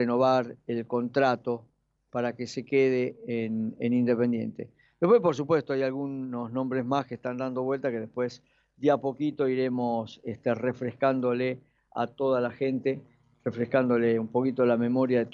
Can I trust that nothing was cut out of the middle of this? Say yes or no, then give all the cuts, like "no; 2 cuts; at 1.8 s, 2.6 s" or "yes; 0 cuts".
yes; 0 cuts